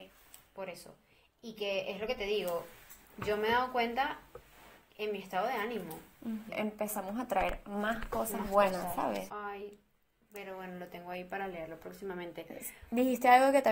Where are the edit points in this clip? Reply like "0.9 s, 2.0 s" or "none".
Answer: 6.5 s, 9.3 s